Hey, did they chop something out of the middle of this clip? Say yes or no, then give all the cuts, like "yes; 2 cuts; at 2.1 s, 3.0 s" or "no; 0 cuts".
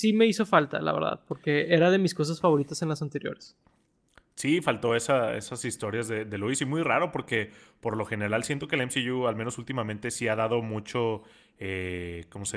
no; 0 cuts